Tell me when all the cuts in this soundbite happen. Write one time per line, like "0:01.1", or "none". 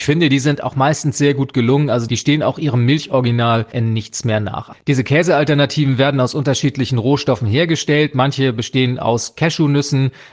none